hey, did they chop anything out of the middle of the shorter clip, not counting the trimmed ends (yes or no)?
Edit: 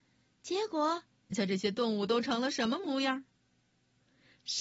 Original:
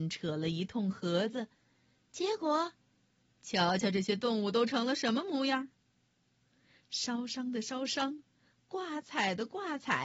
yes